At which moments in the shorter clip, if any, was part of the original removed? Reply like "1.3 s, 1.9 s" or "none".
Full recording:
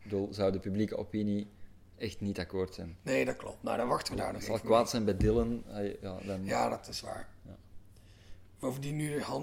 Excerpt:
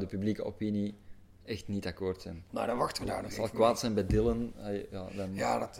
2.5 s

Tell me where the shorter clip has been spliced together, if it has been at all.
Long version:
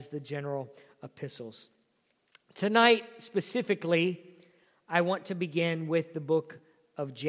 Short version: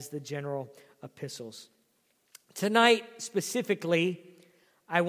none

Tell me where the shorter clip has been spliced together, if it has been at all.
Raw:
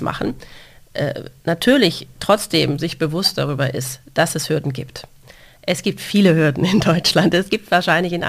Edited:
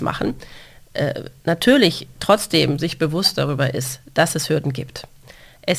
none

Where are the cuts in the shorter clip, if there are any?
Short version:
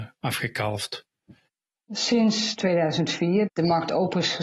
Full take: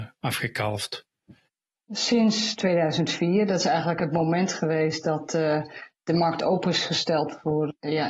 3.5 s

